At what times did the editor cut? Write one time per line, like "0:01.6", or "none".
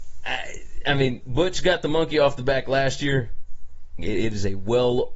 0:01.2
0:04.0

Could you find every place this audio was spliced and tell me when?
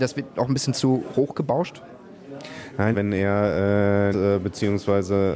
0:02.9
0:04.1

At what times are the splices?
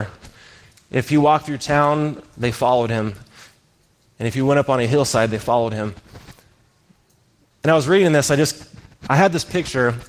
none

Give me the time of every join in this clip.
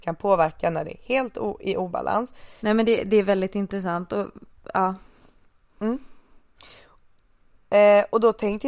0:02.6

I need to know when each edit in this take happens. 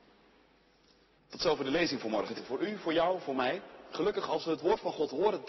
0:01.2
0:02.3

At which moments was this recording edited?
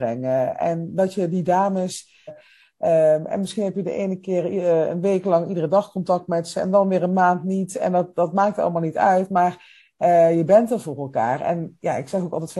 0:02.3

